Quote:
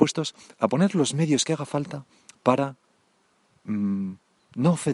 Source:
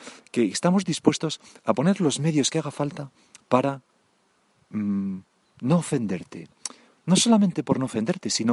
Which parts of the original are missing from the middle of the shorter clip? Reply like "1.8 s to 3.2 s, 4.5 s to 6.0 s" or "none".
none